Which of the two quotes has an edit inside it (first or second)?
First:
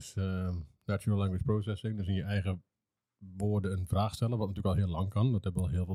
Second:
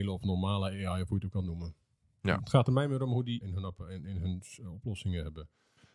second